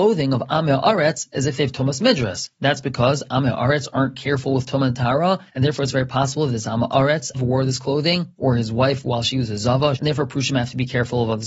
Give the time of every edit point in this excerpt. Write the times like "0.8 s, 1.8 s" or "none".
7.3 s, 9.9 s